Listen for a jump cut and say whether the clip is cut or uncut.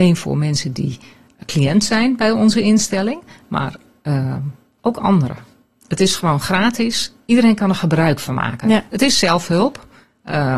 cut